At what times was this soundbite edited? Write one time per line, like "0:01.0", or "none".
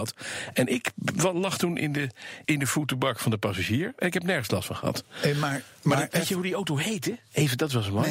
0:02.4